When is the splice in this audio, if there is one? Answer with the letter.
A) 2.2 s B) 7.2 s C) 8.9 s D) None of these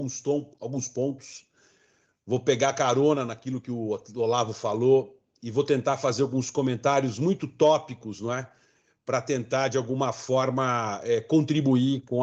D